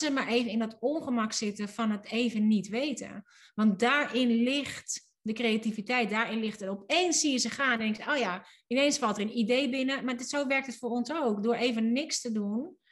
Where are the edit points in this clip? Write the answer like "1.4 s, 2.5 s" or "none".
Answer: none